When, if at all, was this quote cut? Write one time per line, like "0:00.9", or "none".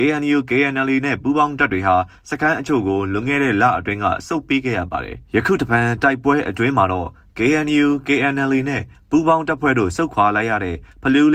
0:05.3